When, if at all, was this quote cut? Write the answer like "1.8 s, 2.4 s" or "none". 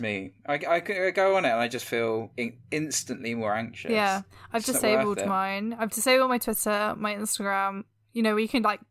none